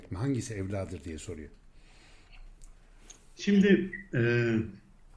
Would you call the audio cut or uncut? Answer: uncut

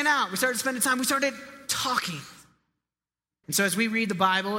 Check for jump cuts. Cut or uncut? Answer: cut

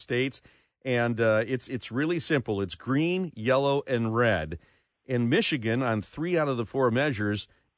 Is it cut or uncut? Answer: uncut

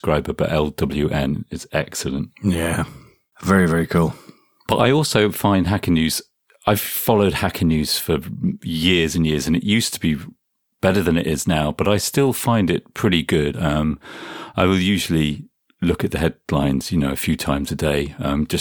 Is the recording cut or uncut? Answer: uncut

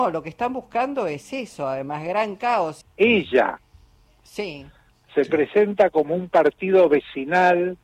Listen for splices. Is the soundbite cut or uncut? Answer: cut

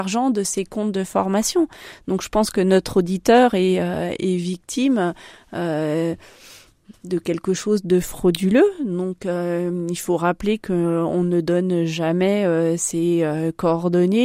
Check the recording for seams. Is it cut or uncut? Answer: uncut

